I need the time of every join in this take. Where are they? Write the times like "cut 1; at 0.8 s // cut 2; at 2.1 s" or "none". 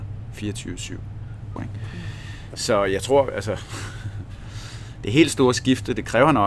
cut 1; at 1.6 s